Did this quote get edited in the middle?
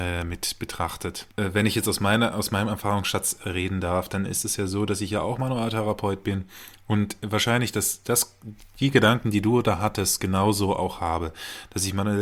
yes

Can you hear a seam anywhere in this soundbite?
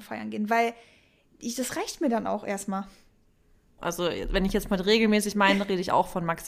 yes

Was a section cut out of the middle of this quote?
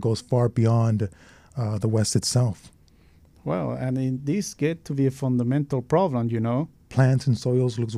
yes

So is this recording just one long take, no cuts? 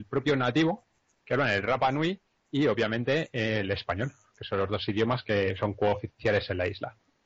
yes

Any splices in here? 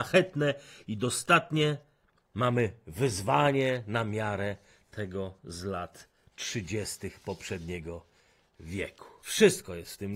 no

